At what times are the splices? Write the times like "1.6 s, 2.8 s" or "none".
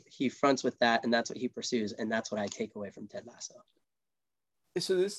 none